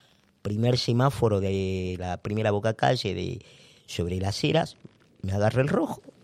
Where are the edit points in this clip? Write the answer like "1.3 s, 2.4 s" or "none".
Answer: none